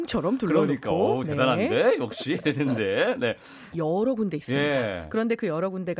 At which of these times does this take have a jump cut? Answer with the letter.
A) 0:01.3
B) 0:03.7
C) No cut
B